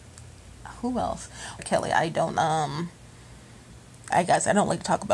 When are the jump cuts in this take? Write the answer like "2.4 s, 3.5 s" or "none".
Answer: 1.6 s, 4.1 s